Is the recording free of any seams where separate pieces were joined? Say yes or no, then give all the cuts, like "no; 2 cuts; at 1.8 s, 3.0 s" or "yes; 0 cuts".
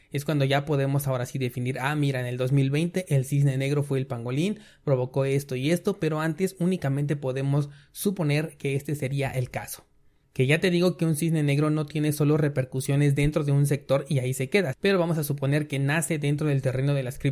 no; 2 cuts; at 10.2 s, 14.7 s